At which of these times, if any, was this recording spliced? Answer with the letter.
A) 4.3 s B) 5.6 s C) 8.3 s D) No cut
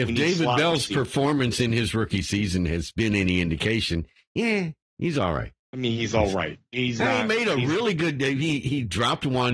B